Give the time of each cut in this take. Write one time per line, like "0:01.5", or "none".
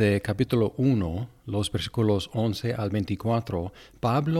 none